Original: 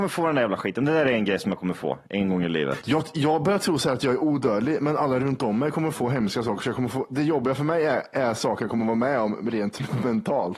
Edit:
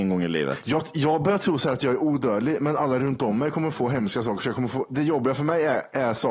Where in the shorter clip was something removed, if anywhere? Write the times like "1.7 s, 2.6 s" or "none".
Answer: none